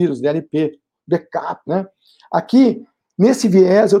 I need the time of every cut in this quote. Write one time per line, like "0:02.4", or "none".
0:01.7